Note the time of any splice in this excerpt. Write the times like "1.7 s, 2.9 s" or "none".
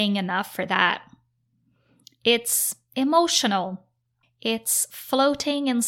4.2 s